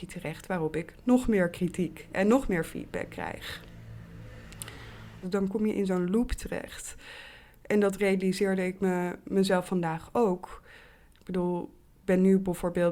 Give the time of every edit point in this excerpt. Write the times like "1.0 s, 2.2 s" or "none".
5.2 s

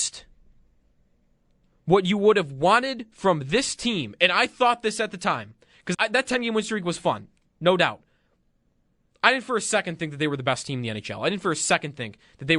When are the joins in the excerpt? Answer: 5.9 s

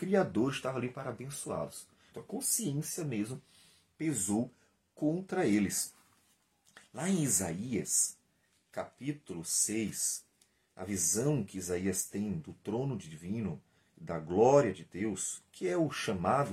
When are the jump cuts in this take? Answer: 2.1 s

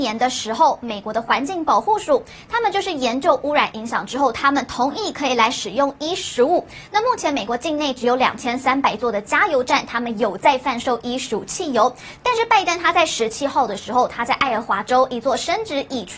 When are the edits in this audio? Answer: none

